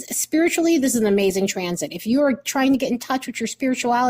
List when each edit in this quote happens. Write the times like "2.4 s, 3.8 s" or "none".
none